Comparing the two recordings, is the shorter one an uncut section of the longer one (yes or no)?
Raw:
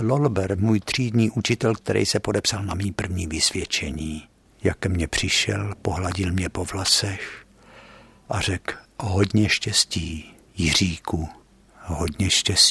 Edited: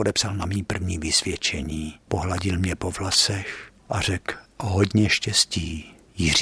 no